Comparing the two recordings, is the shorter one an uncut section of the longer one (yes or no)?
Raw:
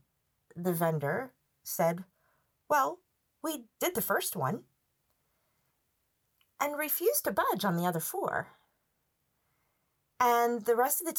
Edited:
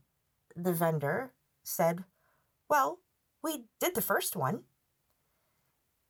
yes